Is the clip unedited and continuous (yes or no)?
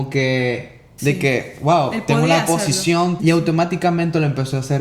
no